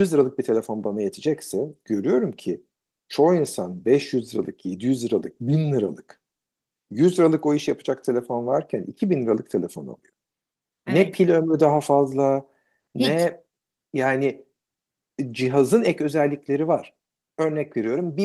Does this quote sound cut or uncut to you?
uncut